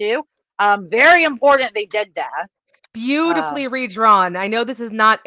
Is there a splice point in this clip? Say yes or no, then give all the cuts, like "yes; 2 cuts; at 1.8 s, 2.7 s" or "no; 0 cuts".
no; 0 cuts